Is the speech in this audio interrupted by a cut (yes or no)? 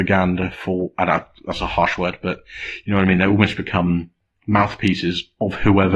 no